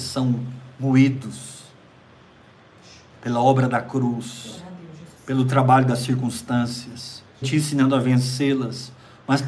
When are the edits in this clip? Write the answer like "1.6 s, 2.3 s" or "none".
5.2 s, 7.4 s